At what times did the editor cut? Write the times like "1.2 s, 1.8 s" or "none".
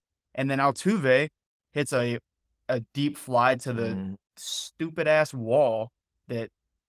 none